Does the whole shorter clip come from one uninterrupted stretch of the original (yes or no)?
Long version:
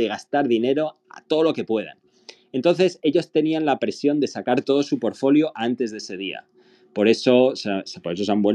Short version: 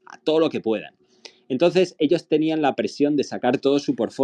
yes